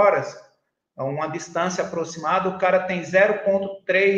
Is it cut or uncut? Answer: uncut